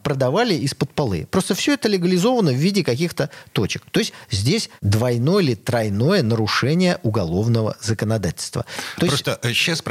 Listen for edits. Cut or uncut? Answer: cut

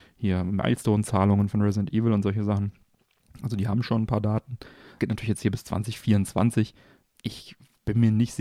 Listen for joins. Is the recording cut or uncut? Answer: uncut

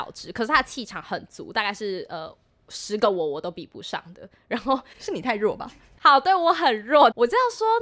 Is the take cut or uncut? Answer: uncut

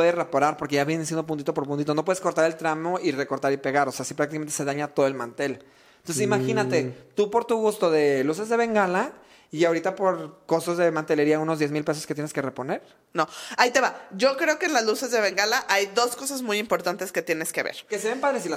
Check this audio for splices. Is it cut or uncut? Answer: uncut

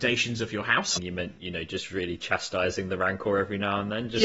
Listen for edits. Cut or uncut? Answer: cut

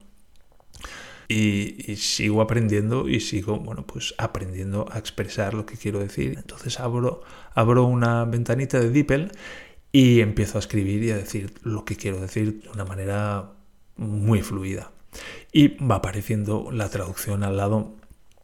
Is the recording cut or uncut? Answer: cut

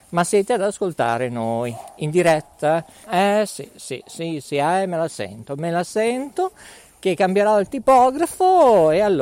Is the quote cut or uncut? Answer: cut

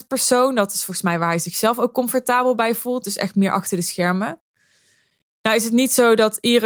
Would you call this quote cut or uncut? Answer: uncut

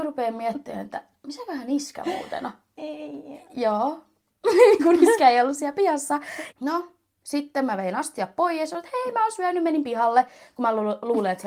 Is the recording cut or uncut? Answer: cut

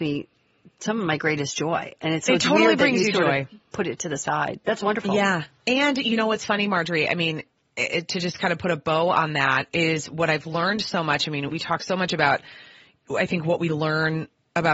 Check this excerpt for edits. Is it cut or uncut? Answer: uncut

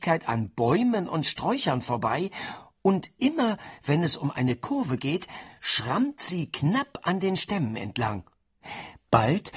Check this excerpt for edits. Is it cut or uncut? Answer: uncut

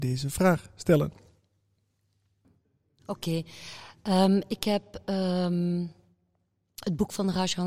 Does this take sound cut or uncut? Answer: uncut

